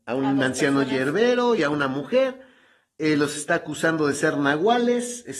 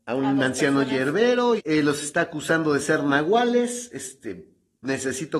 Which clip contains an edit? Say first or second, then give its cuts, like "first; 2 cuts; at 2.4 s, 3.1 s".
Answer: second; 1 cut; at 1.6 s